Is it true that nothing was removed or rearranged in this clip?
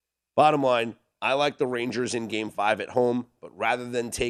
yes; 0 cuts

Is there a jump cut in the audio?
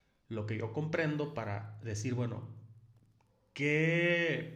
no; 0 cuts

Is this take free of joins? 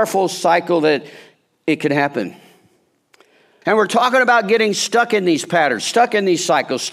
no; 1 cut; at 3.6 s

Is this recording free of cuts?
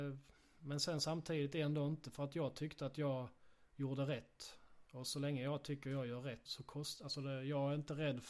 no; 2 cuts; at 4.8 s, 6.5 s

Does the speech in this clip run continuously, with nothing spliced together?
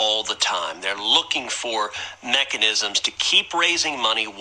yes; 0 cuts

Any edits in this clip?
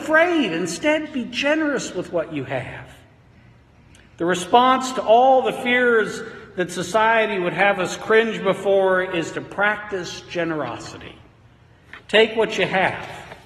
yes; 1 cut; at 1.1 s

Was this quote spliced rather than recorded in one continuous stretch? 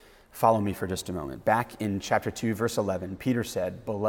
no; 0 cuts

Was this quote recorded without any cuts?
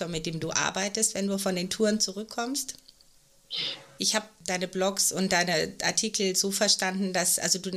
no; 1 cut; at 4.0 s

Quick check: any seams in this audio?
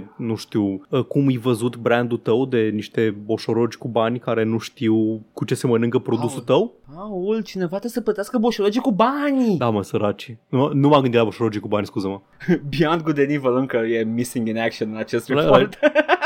no; 0 cuts

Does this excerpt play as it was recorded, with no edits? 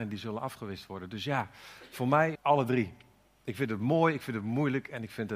no; 1 cut; at 2.4 s

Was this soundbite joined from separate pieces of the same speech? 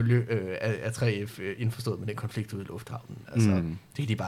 no; 0 cuts

